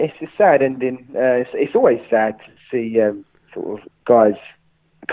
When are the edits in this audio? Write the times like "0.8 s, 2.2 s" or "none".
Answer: none

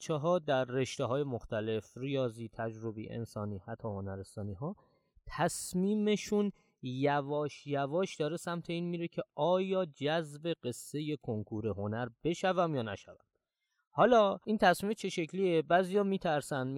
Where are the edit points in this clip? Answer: none

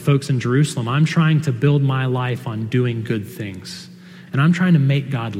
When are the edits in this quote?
4.3 s

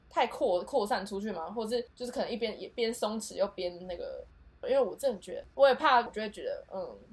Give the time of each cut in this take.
4.6 s, 6.1 s

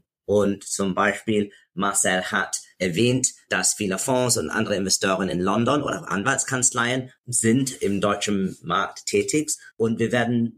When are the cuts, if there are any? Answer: none

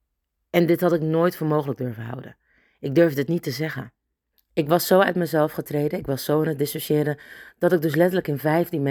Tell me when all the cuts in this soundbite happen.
4.3 s

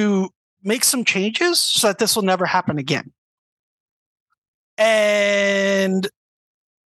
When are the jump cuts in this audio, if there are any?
none

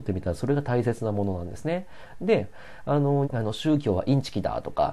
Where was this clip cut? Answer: 2.2 s, 3.2 s

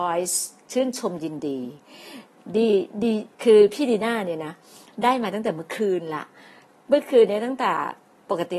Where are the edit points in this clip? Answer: 3.3 s

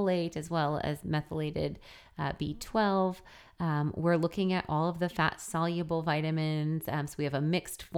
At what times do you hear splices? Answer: none

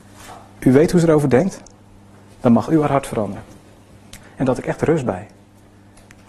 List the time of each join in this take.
4.2 s

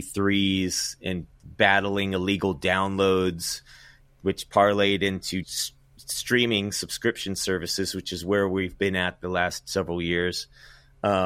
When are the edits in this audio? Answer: 5.4 s

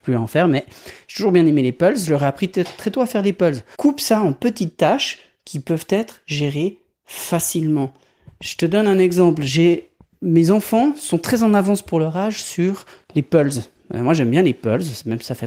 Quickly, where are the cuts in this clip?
3.7 s

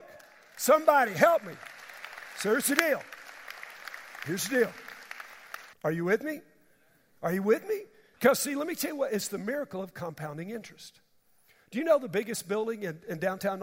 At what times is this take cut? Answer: 5.7 s, 8.1 s

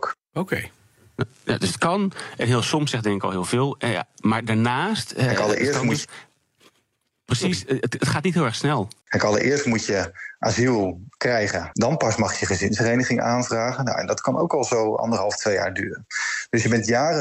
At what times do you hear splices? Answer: 9.0 s, 11.7 s

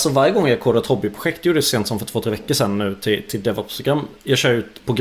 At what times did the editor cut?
none

